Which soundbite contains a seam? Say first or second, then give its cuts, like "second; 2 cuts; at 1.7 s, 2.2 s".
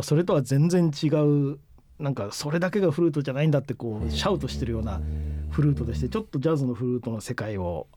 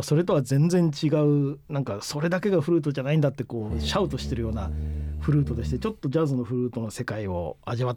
second; 1 cut; at 1.6 s